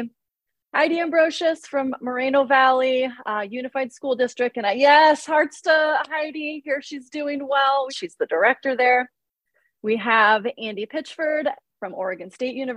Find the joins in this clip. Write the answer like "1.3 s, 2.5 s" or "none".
7.9 s

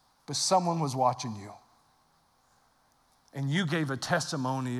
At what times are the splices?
none

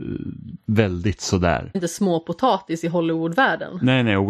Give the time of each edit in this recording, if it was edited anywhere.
1.7 s

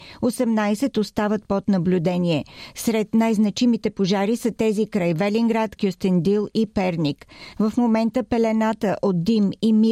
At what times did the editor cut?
5.8 s, 7.5 s

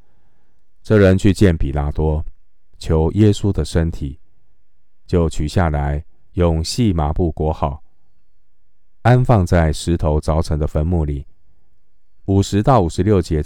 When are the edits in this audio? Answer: 12.3 s

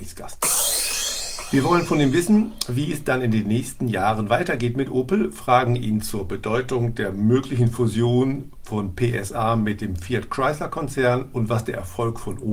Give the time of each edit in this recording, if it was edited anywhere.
none

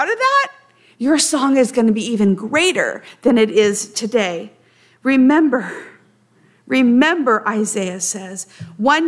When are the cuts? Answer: none

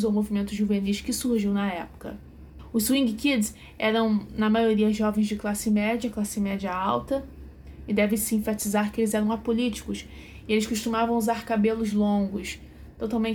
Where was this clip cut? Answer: none

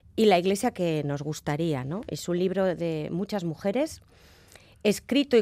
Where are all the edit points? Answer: none

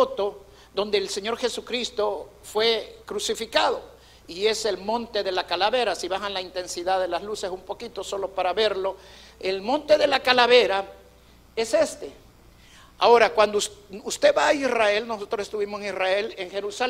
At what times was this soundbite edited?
none

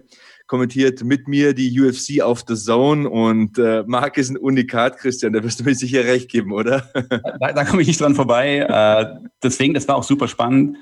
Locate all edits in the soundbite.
none

